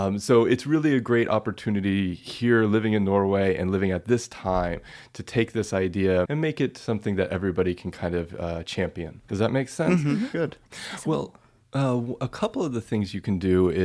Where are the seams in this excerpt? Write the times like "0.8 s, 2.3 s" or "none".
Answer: 6.3 s, 9.3 s, 10.3 s